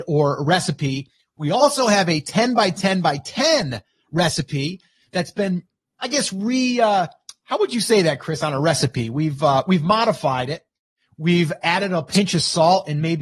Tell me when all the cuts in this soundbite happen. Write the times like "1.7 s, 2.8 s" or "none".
5.8 s